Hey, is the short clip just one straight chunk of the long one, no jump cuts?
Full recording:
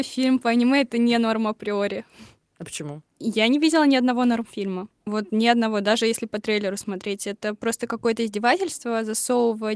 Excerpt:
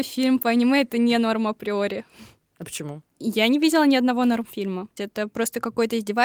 no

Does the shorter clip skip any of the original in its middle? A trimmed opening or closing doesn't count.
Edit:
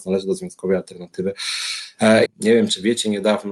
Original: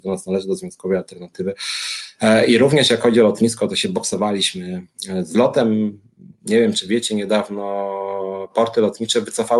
yes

